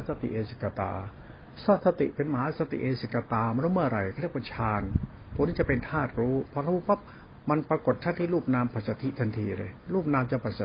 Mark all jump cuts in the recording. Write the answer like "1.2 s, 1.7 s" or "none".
none